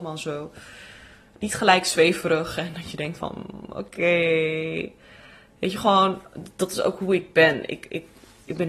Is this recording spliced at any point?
no; 0 cuts

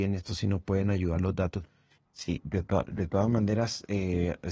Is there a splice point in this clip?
yes; 1 cut; at 2.1 s

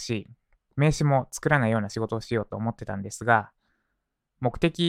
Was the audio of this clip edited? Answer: no; 0 cuts

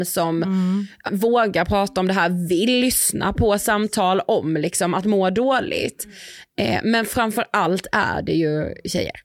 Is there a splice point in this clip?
yes; 1 cut; at 1.1 s

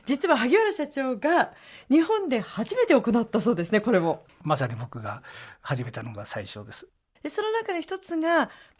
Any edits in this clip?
yes; 1 cut; at 7.2 s

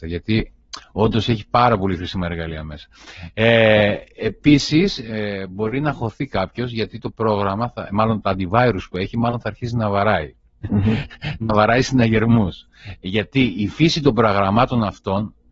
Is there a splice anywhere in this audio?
no; 0 cuts

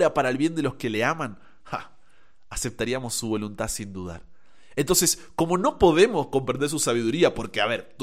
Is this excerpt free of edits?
yes; 0 cuts

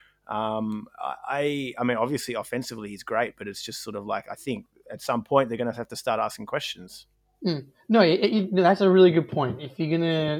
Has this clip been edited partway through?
no; 0 cuts

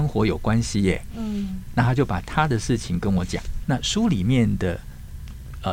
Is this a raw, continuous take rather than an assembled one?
no; 2 cuts; at 1.7 s, 3.6 s

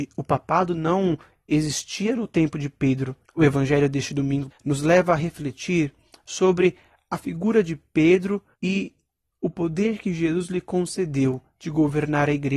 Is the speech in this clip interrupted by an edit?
yes; 3 cuts; at 3.2 s, 4.5 s, 8.5 s

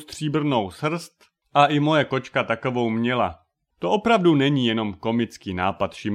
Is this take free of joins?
no; 1 cut; at 3.7 s

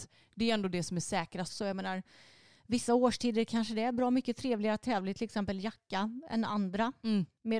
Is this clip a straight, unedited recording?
no; 1 cut; at 1.5 s

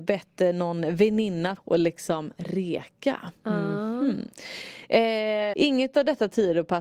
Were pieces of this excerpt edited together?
yes; 2 cuts; at 1.6 s, 5.5 s

